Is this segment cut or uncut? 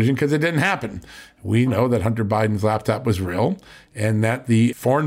cut